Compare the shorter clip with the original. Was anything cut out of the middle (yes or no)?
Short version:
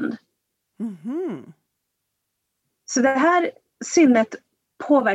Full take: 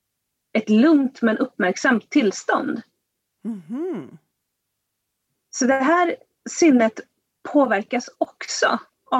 no